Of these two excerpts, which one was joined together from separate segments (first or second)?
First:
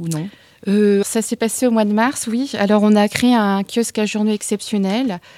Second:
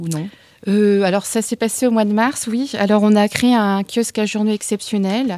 first